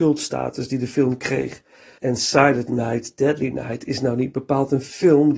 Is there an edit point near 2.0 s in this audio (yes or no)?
yes